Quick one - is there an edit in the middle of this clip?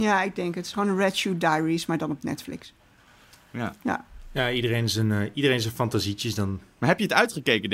no; 0 cuts

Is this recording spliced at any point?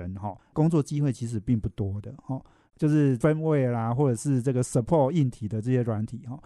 yes; 1 cut; at 2.7 s

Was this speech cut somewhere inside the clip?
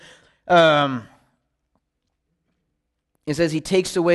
no; 0 cuts

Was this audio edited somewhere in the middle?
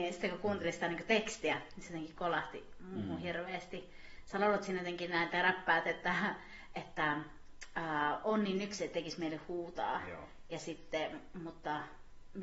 no; 0 cuts

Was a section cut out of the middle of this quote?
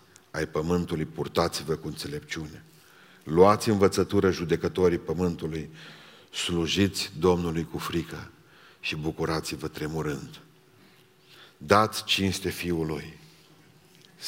no; 0 cuts

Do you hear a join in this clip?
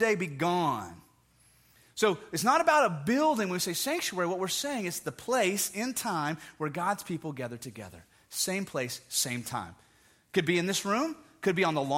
no; 0 cuts

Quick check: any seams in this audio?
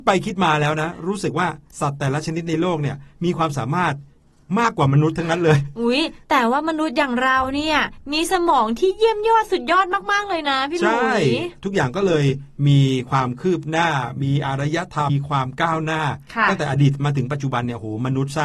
yes; 1 cut; at 15.1 s

